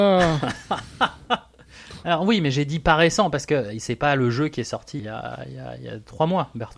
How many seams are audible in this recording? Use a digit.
1